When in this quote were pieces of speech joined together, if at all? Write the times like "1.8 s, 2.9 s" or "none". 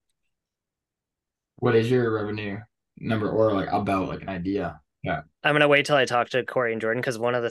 4.9 s

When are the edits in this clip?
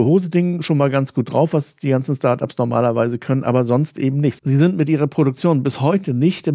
none

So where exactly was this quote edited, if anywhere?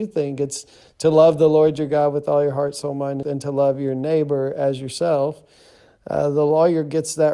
3.2 s

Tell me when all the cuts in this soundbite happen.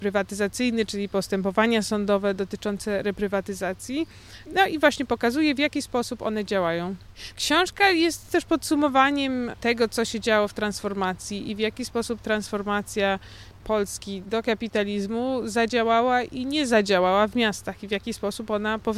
none

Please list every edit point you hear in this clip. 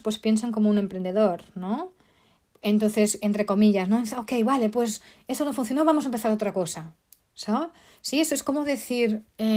none

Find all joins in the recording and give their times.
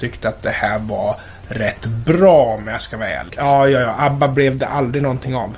3.3 s

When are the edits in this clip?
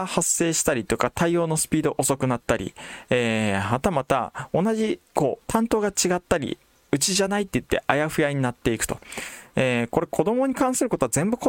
5.4 s

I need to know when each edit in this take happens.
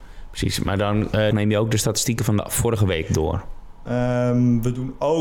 1.3 s, 3.9 s

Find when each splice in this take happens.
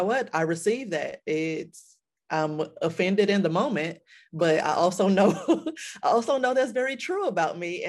none

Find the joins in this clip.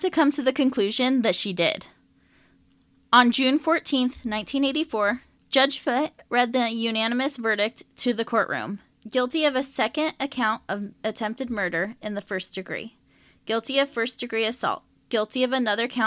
none

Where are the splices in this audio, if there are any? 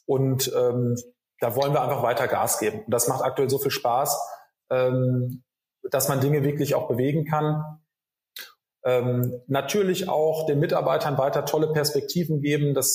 8.6 s

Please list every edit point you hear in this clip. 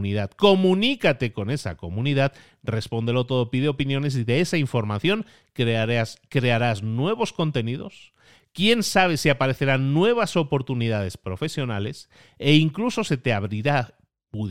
none

